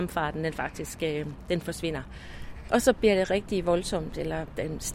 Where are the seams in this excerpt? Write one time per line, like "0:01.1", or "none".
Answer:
0:02.7